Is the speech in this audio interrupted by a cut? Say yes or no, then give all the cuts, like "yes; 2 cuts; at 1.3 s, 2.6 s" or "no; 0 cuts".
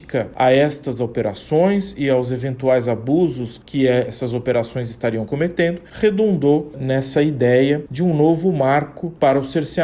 no; 0 cuts